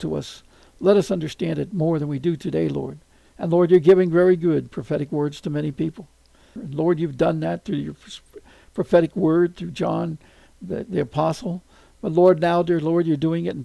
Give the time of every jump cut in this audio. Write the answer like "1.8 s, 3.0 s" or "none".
3.2 s, 6.6 s